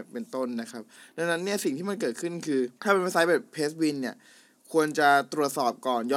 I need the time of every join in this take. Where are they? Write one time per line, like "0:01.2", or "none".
0:02.8